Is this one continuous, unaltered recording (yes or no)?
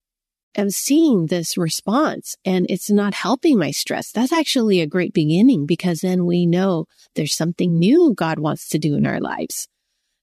yes